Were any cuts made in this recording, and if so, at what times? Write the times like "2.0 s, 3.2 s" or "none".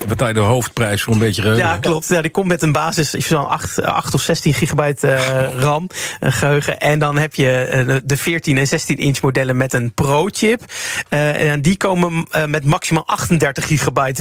none